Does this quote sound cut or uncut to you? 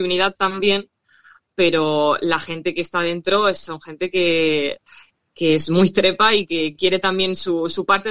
uncut